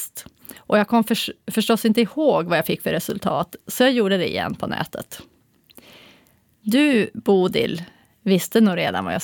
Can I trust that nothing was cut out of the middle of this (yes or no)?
yes